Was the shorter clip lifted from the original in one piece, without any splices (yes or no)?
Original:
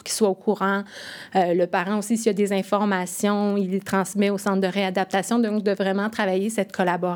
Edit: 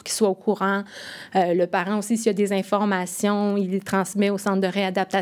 yes